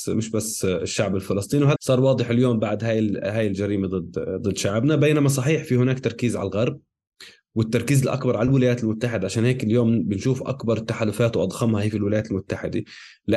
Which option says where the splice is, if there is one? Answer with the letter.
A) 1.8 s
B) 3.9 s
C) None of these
A